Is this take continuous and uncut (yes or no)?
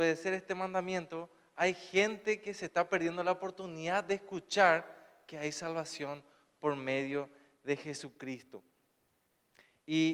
yes